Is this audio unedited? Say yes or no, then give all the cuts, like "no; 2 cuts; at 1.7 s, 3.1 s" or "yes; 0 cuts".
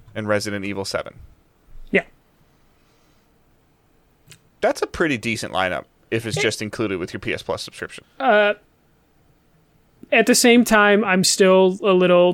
no; 1 cut; at 8.0 s